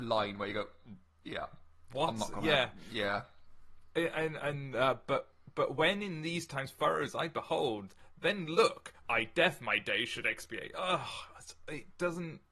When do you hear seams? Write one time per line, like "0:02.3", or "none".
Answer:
none